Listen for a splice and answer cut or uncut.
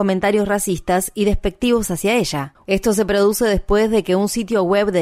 cut